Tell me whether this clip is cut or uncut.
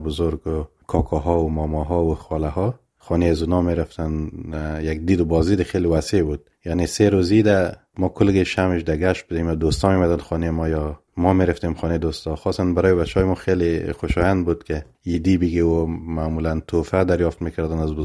uncut